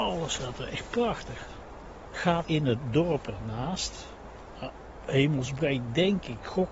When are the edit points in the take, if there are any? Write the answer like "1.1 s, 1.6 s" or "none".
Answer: 2.4 s

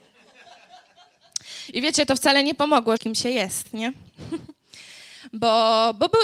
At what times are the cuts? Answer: 3.0 s

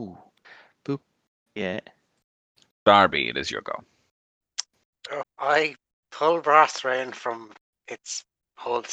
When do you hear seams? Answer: 1.5 s, 5.2 s

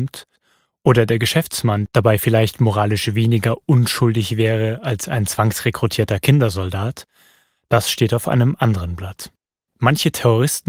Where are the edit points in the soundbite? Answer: 1.9 s

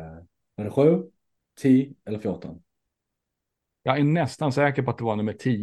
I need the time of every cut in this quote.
none

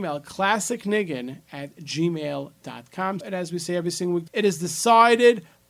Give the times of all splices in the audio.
3.2 s, 4.3 s

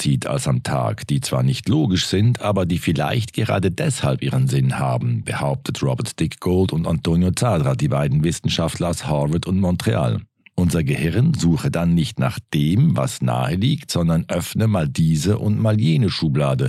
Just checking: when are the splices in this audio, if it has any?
none

